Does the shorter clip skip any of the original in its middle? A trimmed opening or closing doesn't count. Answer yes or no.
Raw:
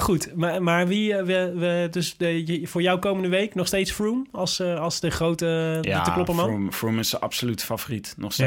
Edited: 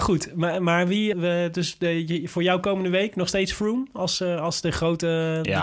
yes